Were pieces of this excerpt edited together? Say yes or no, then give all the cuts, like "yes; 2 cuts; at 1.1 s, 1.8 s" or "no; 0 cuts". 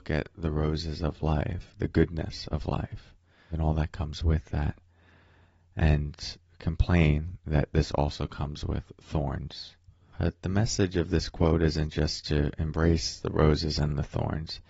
yes; 2 cuts; at 3.5 s, 10.1 s